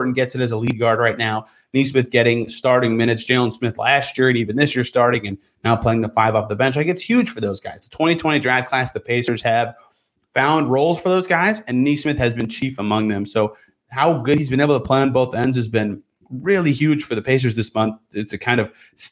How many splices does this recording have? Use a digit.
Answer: 0